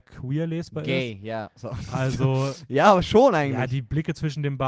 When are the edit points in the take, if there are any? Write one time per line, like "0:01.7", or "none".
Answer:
none